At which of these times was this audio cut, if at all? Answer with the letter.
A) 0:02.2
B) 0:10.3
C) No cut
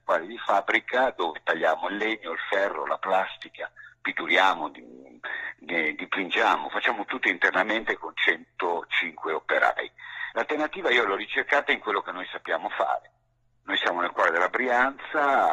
B